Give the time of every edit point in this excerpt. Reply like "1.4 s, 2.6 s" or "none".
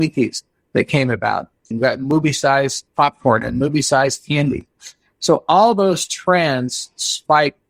1.7 s

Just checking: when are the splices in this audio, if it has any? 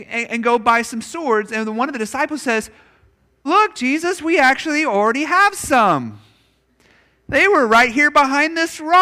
3.5 s

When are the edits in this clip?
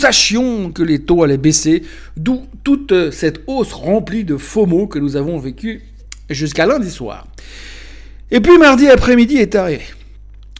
none

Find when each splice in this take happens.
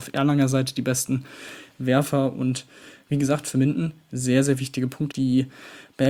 5.1 s

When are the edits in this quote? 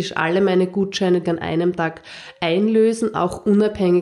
1.2 s

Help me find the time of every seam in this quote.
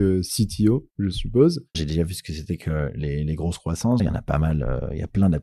1.7 s, 4.0 s

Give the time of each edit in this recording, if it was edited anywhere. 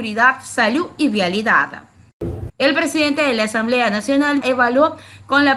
2.5 s, 4.4 s

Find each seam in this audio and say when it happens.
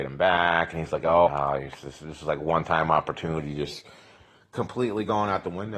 1.3 s

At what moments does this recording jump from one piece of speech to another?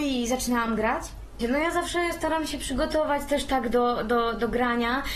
1.4 s

